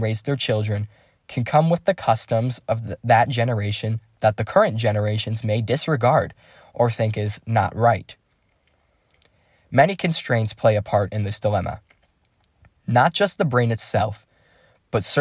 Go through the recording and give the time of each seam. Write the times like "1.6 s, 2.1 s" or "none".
none